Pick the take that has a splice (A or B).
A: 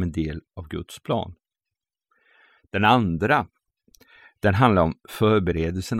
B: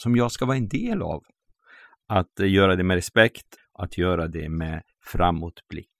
B